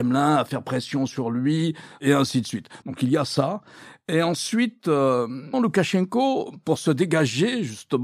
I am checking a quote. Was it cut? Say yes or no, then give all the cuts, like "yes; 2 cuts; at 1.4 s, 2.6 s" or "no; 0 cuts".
yes; 2 cuts; at 2.8 s, 5.5 s